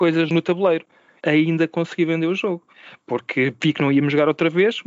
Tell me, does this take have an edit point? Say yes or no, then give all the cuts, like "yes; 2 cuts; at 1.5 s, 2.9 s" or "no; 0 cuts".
no; 0 cuts